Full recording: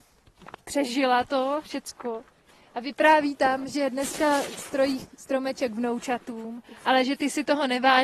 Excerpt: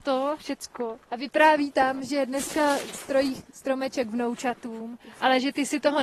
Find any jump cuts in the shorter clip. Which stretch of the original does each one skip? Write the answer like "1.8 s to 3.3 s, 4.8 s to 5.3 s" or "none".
2.3 s to 2.7 s